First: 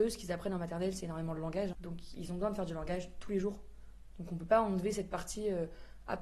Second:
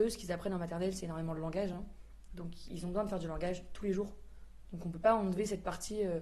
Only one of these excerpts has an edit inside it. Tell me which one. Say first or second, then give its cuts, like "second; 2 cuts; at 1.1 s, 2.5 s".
first; 1 cut; at 1.7 s